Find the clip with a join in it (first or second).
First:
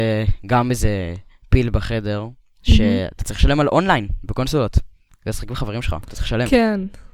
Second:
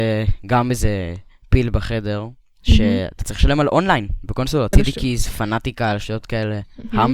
second